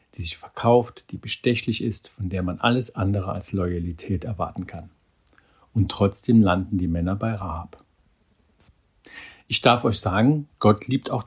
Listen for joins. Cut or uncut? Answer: uncut